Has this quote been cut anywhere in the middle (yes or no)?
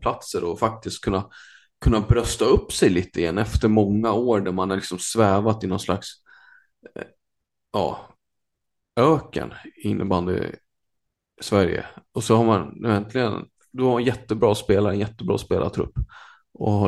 no